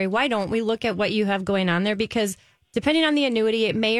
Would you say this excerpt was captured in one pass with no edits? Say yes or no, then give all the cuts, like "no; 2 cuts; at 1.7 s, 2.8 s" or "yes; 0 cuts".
yes; 0 cuts